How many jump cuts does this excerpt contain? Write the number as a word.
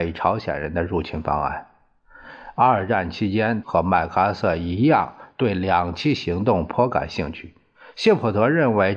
one